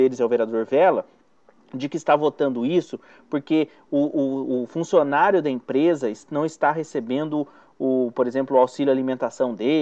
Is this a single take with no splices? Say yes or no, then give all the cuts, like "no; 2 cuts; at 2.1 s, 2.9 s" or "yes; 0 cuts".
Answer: yes; 0 cuts